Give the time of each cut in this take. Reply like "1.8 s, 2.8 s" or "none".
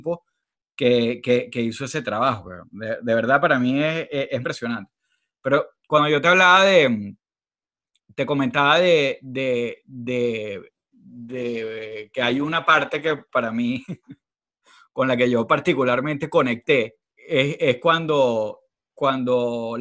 4.4 s, 17.1 s